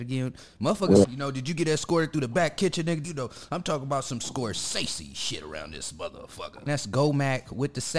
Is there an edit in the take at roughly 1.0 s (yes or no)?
yes